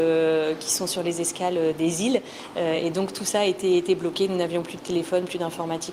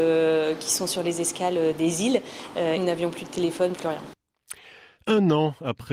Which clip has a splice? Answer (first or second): second